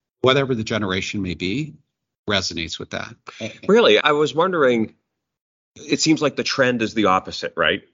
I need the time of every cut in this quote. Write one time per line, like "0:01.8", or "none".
0:04.0